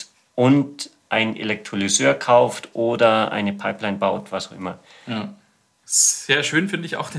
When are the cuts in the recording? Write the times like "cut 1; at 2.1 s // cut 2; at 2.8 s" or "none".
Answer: cut 1; at 5.8 s